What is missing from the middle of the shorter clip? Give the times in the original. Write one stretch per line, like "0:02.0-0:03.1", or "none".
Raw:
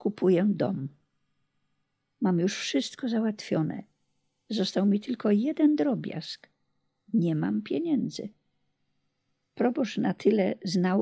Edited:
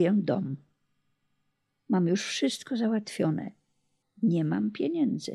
0:04.3-0:06.9